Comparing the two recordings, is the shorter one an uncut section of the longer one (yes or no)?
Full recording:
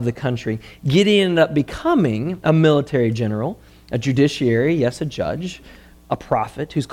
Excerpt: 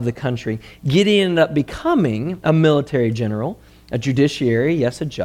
yes